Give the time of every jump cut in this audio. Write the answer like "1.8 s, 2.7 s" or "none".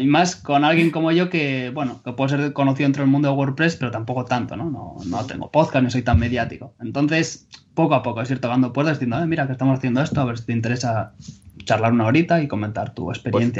none